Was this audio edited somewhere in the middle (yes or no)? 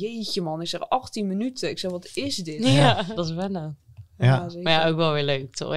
yes